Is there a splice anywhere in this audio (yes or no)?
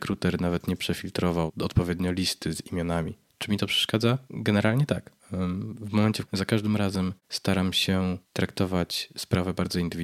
yes